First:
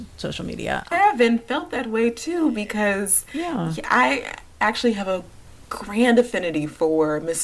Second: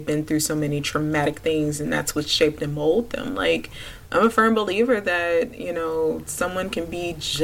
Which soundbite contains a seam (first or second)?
first